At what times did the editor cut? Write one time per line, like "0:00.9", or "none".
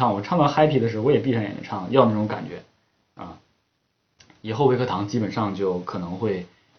none